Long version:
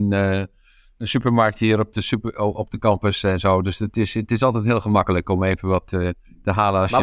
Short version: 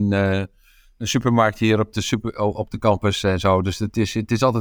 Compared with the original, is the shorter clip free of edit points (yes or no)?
yes